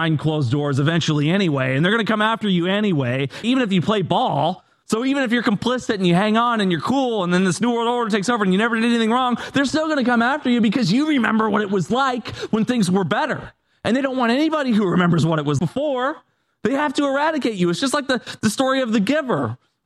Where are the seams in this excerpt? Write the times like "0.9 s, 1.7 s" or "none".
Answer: 3.4 s, 4.8 s, 15.6 s